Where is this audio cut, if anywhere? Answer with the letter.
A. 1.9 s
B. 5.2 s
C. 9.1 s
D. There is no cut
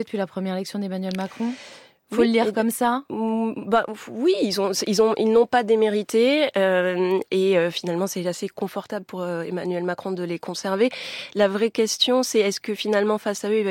D